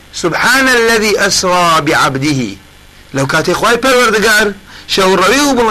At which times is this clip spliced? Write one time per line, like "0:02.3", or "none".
none